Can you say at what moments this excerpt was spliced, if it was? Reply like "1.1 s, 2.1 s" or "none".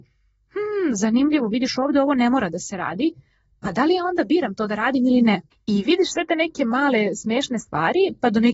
5.5 s